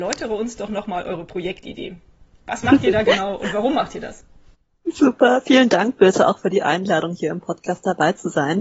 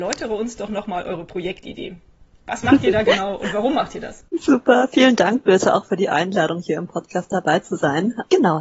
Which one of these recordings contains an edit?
second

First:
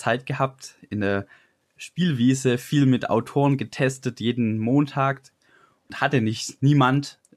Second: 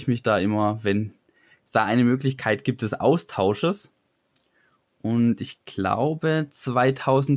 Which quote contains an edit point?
first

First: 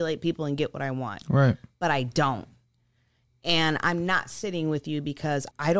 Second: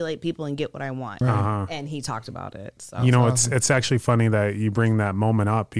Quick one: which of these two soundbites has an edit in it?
second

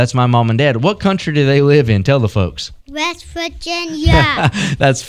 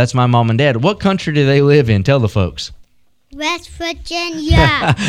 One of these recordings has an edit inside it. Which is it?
first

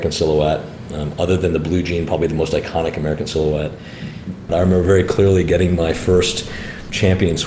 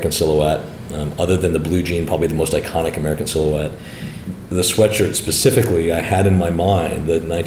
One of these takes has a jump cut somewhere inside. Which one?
first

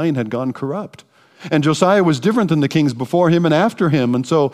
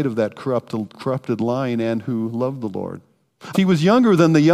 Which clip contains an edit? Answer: second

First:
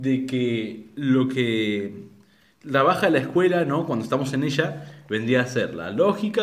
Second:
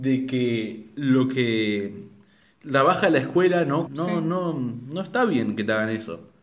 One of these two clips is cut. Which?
second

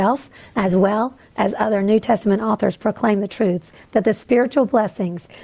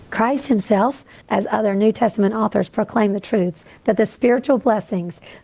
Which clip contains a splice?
second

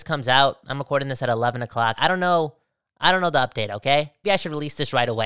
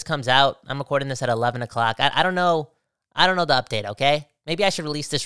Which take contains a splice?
first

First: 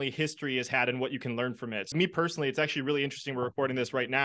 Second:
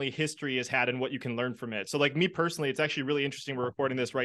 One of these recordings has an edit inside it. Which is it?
first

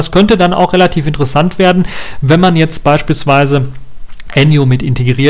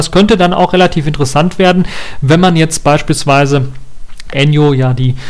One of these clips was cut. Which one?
second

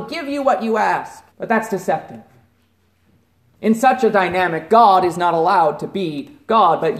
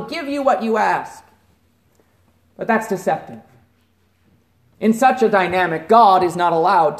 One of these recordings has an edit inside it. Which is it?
first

